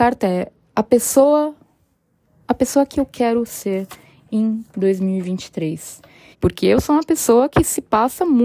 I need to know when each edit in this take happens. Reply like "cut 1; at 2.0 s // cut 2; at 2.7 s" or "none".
cut 1; at 6.3 s